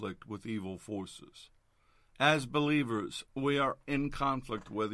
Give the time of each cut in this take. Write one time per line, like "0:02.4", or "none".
0:03.8